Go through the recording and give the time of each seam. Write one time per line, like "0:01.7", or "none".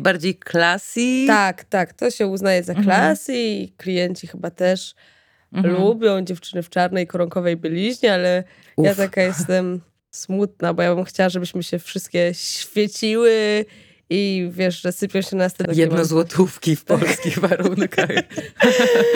0:15.7